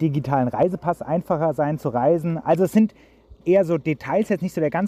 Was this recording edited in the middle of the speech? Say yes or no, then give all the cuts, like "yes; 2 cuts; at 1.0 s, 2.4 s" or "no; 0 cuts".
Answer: yes; 1 cut; at 3.4 s